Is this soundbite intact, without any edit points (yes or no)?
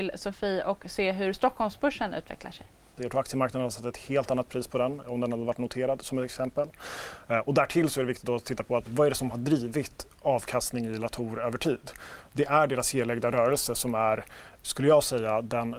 no